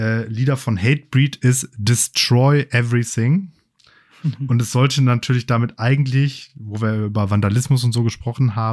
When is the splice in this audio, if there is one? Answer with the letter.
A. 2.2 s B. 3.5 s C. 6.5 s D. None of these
D